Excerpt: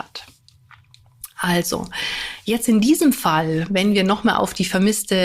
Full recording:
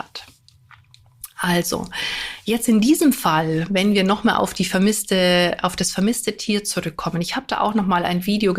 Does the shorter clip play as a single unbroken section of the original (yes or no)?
yes